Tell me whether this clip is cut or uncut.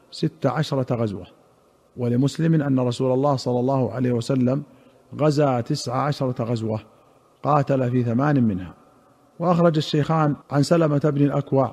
cut